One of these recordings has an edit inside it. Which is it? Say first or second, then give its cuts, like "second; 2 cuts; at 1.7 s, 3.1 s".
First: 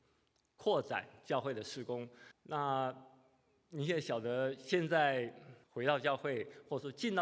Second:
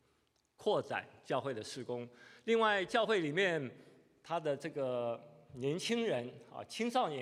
first; 2 cuts; at 2.3 s, 5.6 s